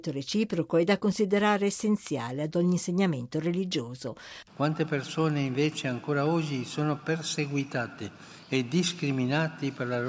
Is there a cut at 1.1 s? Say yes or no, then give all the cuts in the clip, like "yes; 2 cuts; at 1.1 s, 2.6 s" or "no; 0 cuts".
no; 1 cut; at 4.5 s